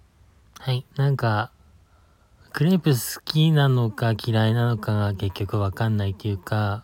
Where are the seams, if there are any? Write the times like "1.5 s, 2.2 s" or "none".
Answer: 0.9 s